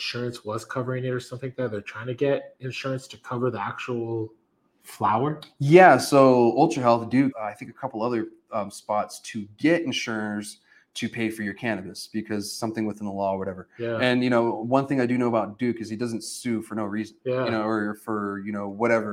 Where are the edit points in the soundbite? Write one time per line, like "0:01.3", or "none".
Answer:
0:07.3